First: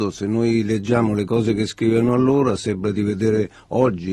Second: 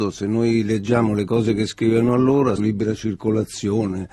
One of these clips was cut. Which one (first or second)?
second